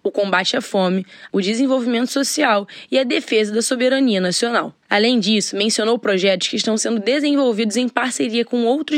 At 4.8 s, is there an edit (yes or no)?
yes